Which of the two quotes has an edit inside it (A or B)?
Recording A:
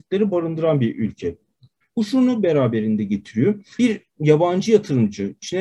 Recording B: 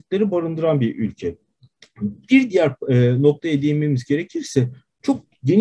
A